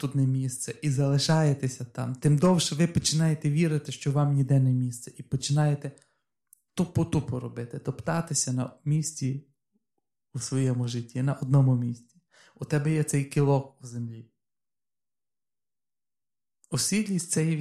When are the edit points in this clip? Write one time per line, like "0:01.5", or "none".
none